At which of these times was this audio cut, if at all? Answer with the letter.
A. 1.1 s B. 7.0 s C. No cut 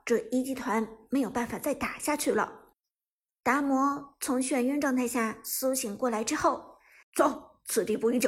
B